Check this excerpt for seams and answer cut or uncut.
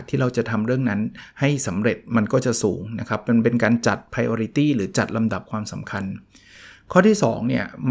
uncut